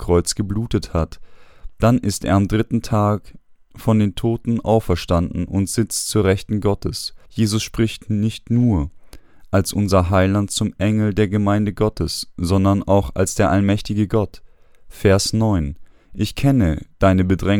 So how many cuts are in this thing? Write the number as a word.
one